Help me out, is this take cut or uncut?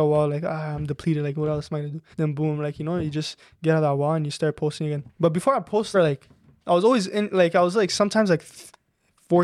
cut